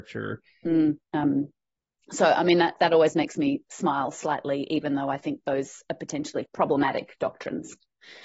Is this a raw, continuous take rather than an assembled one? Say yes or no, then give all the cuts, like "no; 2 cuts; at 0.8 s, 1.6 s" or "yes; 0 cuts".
no; 2 cuts; at 1.0 s, 6.4 s